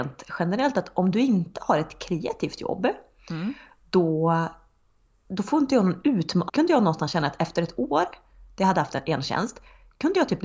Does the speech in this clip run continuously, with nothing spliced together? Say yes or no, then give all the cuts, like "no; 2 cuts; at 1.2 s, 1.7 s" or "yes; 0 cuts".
no; 1 cut; at 6.5 s